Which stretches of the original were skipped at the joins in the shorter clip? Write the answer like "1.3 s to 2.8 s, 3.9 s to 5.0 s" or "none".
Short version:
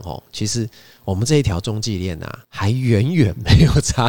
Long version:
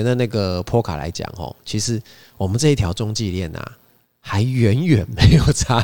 3.8 s to 4.2 s